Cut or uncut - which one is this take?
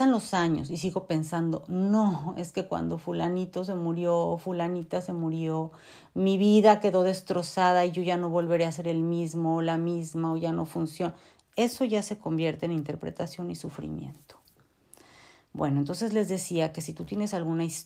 uncut